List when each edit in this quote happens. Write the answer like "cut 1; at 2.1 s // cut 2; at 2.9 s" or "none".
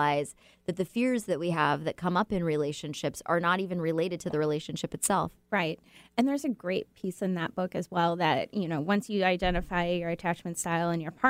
none